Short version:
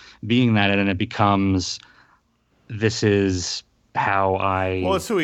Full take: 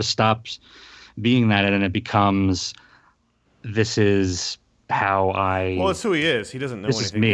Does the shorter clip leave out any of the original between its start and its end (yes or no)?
no